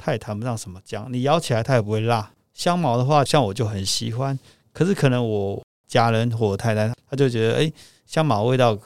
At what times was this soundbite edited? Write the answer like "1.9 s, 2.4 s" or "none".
3.3 s